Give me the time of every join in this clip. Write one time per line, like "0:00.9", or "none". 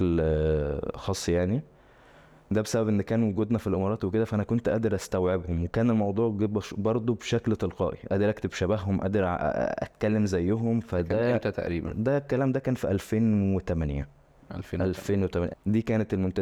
0:15.5